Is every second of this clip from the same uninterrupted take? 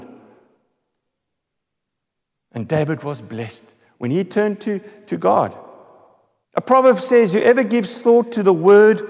no; 1 cut; at 6.4 s

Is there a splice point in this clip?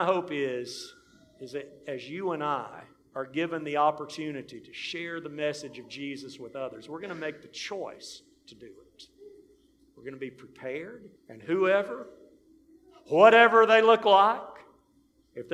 yes; 1 cut; at 11.2 s

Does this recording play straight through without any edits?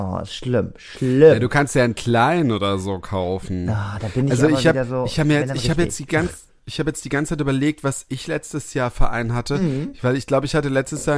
yes; 0 cuts

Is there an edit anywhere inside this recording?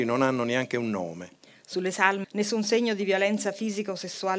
yes; 1 cut; at 2.2 s

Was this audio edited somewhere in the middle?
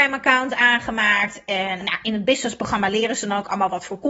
yes; 1 cut; at 1.8 s

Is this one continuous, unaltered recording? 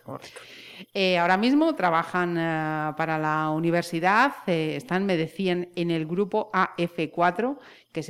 yes; 0 cuts

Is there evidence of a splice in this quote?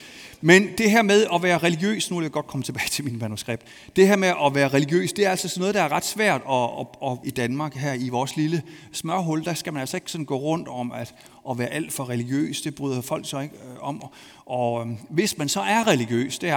yes; 1 cut; at 7.2 s

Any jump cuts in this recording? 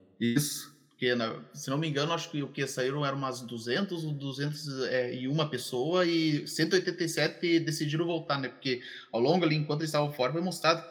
no; 0 cuts

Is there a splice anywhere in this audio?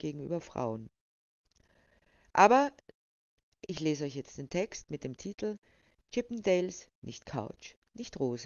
no; 0 cuts

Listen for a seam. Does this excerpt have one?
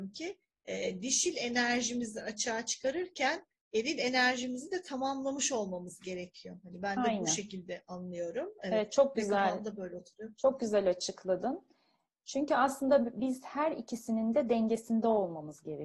no; 0 cuts

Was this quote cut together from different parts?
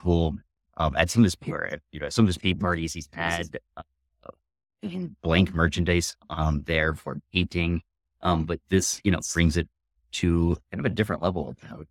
no; 0 cuts

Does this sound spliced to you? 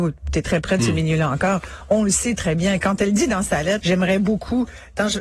yes; 1 cut; at 3.8 s

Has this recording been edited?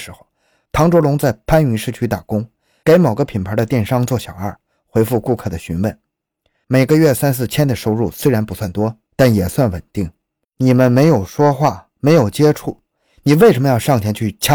yes; 1 cut; at 10.4 s

